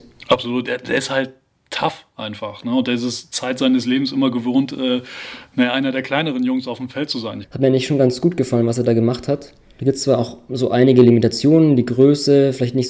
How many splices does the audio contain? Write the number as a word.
one